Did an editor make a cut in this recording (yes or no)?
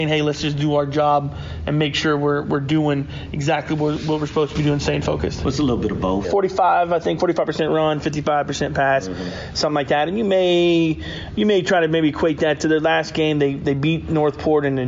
yes